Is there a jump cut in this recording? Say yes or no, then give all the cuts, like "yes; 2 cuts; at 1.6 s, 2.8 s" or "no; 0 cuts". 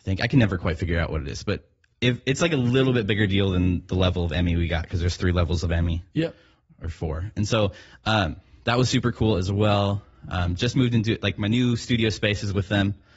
no; 0 cuts